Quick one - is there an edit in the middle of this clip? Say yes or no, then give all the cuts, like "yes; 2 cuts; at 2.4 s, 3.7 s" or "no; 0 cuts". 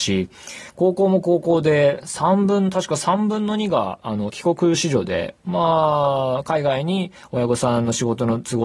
no; 0 cuts